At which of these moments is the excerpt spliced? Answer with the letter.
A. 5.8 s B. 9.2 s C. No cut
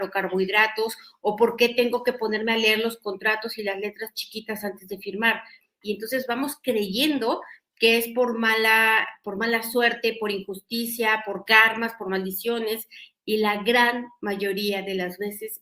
A